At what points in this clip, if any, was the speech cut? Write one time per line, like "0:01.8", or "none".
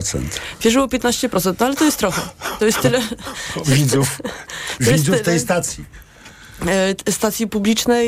none